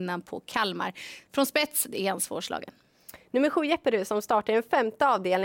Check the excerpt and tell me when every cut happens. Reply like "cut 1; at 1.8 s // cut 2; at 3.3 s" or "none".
none